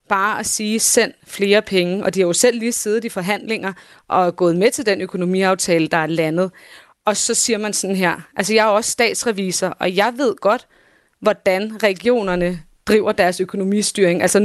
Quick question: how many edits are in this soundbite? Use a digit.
0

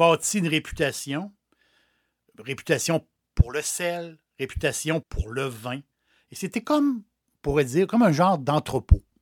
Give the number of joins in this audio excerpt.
1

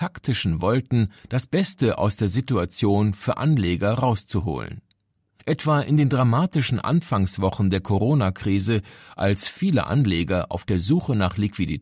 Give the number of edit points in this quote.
1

